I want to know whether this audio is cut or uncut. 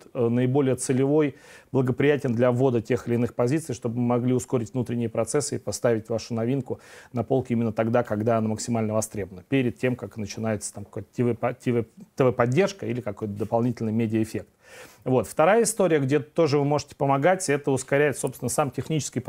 uncut